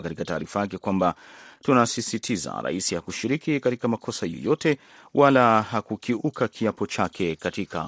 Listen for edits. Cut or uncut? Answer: uncut